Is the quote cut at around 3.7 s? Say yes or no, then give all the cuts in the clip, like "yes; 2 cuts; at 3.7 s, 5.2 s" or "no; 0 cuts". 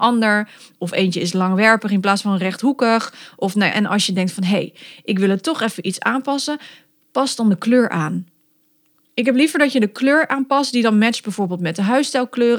yes; 2 cuts; at 3.7 s, 9.0 s